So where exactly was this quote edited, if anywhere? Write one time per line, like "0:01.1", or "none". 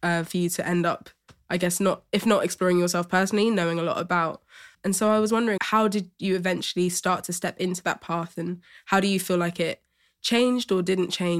0:05.6